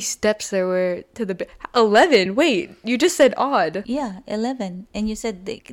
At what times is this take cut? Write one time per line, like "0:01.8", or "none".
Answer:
none